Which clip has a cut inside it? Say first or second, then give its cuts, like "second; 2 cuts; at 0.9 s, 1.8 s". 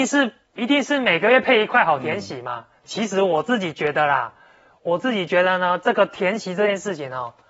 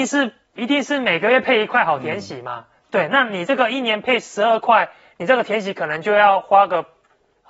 first; 1 cut; at 2.8 s